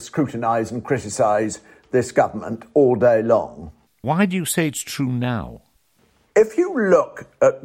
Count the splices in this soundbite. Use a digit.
1